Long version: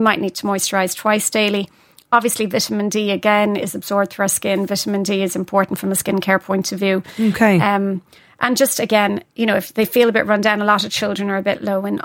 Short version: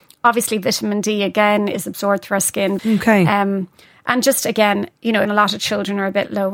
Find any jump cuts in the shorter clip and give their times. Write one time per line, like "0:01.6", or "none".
0:02.8
0:05.2